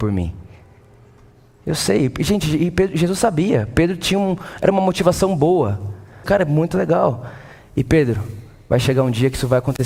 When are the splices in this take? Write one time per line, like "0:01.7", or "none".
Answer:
0:06.2